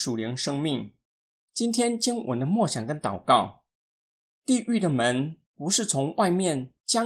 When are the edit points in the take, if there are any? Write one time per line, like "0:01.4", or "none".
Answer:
0:01.3